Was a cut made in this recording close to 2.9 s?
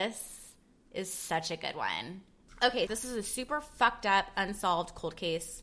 yes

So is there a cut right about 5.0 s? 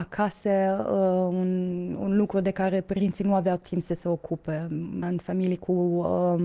yes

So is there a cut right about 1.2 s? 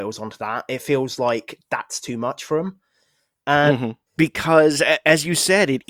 no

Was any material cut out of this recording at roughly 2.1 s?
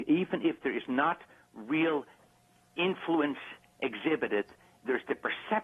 no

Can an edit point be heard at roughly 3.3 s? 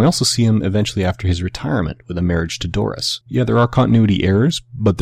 yes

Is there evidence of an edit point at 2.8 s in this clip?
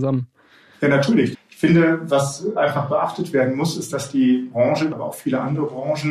no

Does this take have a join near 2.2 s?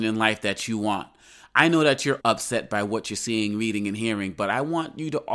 yes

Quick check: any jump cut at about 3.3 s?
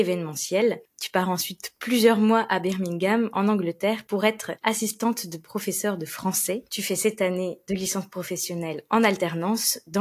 no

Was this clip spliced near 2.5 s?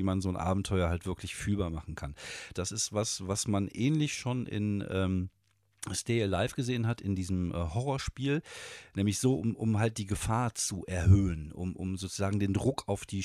yes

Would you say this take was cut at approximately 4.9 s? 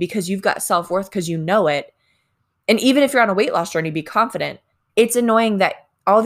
yes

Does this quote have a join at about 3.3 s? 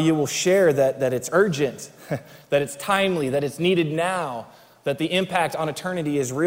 no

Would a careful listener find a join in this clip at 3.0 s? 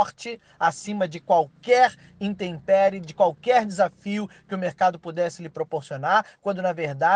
no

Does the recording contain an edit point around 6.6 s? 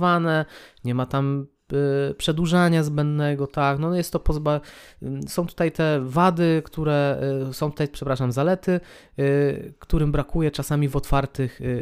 no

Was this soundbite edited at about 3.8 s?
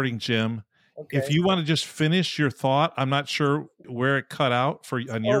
yes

